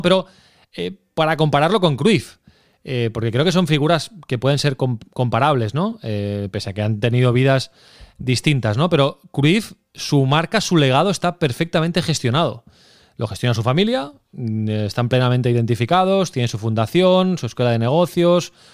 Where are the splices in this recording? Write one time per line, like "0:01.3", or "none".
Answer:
none